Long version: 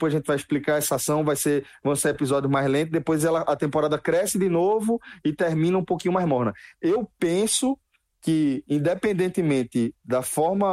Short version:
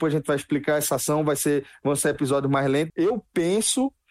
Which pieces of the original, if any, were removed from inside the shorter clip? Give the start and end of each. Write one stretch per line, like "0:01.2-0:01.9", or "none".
0:02.9-0:06.8